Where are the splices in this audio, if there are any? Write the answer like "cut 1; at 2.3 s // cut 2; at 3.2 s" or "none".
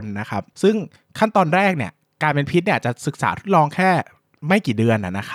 none